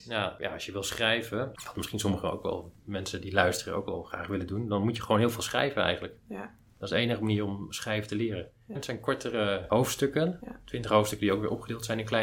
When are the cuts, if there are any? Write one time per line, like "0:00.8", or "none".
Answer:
0:08.7